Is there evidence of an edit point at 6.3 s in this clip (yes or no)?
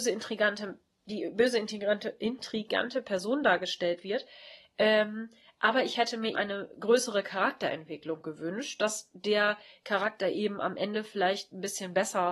yes